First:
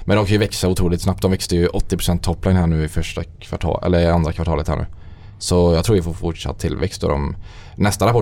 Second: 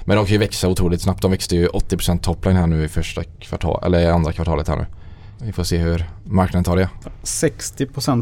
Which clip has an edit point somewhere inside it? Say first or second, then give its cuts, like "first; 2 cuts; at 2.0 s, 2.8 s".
second; 2 cuts; at 5.4 s, 7.0 s